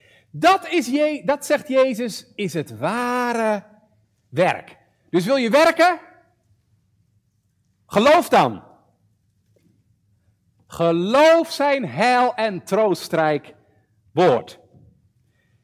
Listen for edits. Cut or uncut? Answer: uncut